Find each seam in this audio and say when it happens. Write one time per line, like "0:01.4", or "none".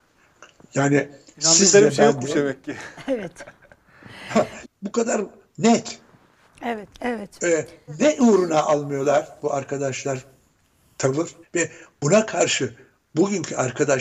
0:04.6
0:06.9
0:11.4